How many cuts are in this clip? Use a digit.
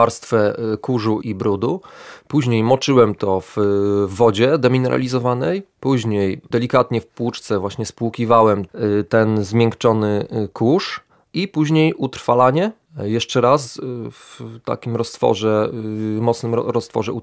1